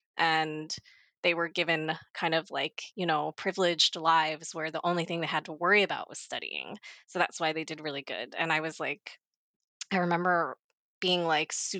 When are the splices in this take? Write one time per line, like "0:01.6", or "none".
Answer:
none